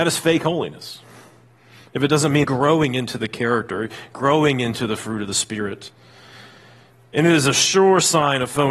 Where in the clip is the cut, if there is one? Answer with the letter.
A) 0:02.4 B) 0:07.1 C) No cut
A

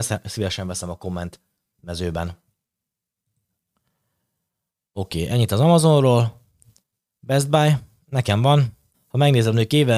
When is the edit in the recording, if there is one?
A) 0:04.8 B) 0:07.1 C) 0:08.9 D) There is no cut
C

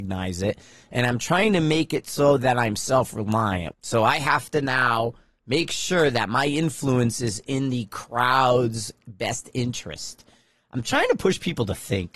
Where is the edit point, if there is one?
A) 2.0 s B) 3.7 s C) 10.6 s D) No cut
B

